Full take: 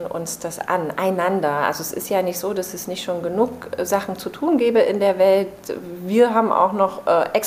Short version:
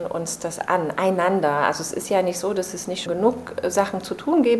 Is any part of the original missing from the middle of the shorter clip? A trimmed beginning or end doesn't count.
yes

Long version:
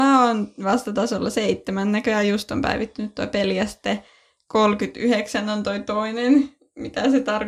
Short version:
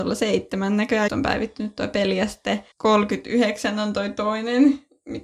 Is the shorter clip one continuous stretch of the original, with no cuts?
no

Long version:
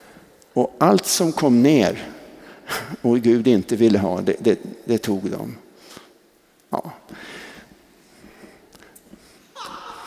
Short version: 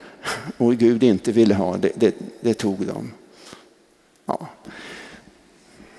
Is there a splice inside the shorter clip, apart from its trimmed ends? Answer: no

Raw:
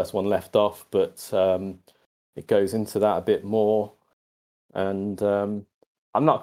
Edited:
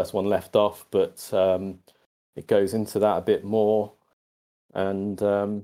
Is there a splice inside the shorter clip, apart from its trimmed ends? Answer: no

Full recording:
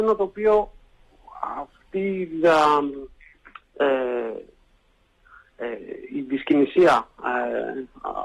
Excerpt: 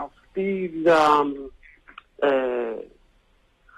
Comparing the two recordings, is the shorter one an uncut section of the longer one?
yes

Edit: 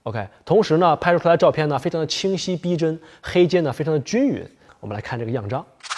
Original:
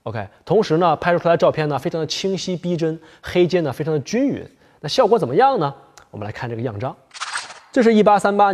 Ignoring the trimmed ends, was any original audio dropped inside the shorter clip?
yes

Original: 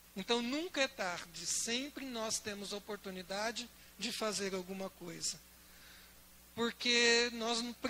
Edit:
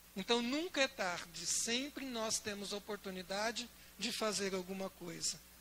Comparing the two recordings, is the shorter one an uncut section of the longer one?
yes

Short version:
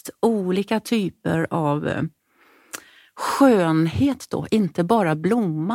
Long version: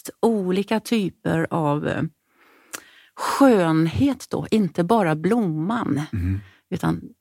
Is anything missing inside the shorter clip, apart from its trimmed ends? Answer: no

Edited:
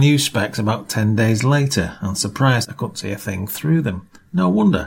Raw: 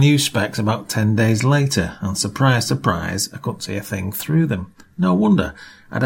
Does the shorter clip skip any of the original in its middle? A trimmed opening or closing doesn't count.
yes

